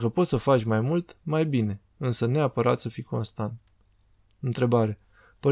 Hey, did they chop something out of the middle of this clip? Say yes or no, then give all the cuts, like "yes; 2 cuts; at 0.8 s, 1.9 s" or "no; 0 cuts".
no; 0 cuts